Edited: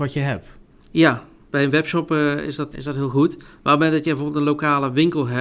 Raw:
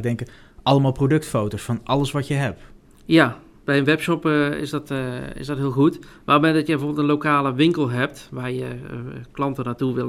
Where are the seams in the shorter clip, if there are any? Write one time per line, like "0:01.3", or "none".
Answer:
0:02.7